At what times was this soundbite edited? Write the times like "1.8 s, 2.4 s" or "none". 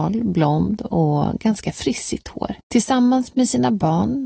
2.6 s